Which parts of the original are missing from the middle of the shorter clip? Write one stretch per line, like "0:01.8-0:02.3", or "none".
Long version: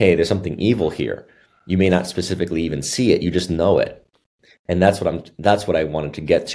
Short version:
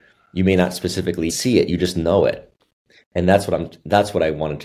0:02.6-0:02.8

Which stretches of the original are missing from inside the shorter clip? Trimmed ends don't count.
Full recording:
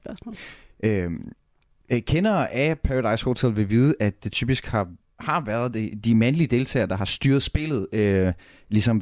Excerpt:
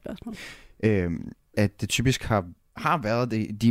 0:01.5-0:04.0

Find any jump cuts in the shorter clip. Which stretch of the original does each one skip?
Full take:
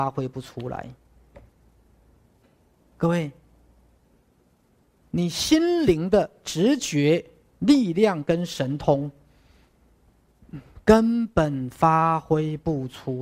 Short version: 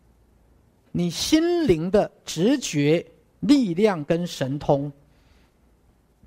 0:02.5-0:05.1

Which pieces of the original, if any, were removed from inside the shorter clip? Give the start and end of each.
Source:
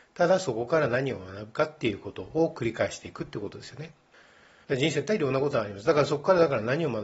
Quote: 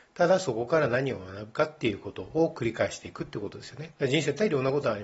0:04.0-0:04.6

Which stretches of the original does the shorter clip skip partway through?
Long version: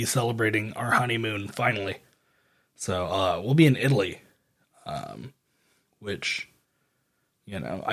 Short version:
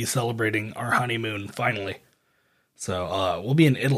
none

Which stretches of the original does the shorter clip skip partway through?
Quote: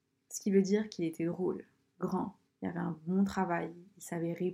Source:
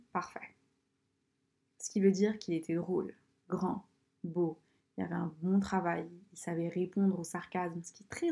0:04.0-0:04.8

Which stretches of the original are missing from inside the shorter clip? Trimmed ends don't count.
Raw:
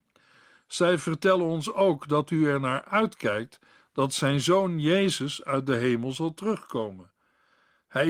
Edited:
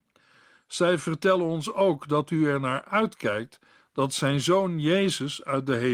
none

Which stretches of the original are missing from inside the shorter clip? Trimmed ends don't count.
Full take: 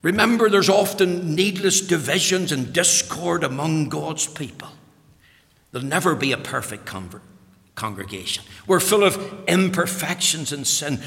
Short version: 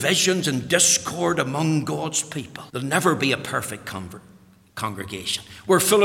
0:04.7-0:05.7

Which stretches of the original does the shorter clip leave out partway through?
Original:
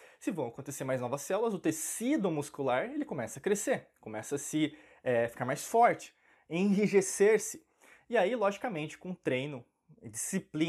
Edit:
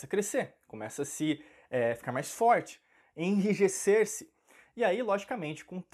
none

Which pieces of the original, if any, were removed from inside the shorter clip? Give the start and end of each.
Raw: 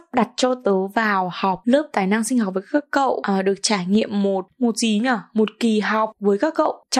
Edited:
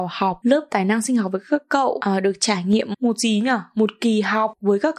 0:04.1-0:04.5

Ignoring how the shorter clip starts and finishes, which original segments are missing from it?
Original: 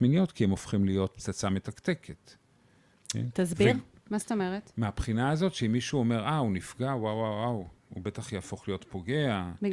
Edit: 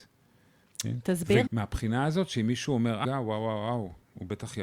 0:03.8-0:04.7
0:06.3-0:06.8

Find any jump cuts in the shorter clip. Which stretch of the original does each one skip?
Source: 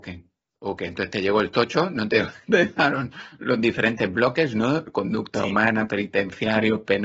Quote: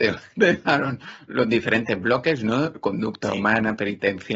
none

